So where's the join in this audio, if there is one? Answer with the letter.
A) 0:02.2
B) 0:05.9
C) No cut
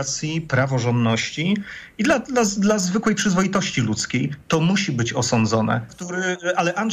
B